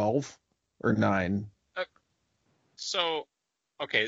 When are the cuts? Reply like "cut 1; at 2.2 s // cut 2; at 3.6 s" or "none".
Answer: none

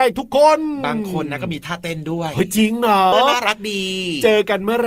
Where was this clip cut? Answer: cut 1; at 3.1 s

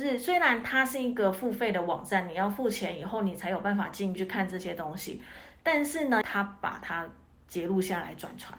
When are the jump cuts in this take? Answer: cut 1; at 4.2 s // cut 2; at 6.2 s

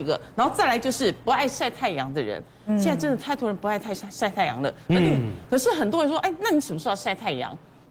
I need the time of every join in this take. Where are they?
none

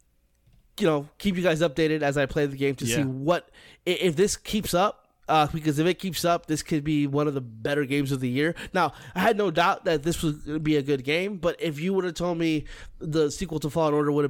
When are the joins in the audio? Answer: none

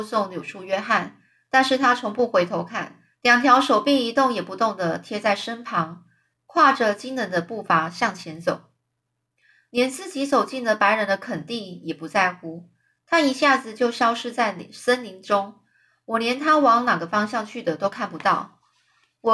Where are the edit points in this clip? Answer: cut 1; at 3.1 s

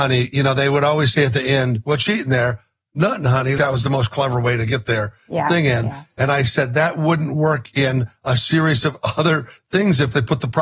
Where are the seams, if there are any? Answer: cut 1; at 3.6 s

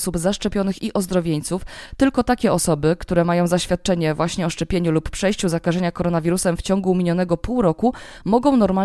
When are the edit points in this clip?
none

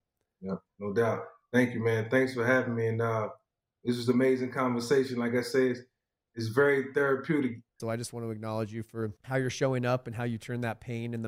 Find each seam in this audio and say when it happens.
cut 1; at 7.8 s // cut 2; at 9.2 s

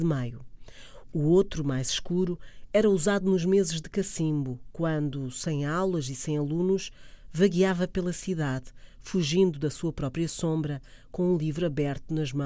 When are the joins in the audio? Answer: none

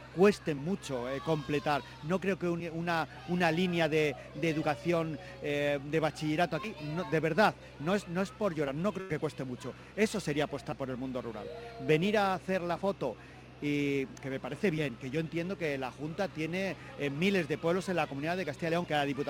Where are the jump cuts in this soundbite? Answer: none

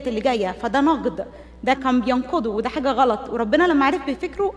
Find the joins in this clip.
cut 1; at 1.7 s

